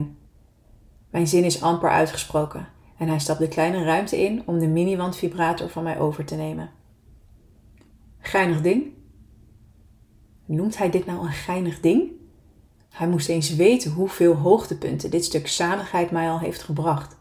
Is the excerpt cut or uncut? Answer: uncut